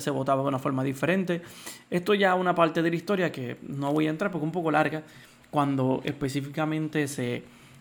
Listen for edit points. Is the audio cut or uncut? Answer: uncut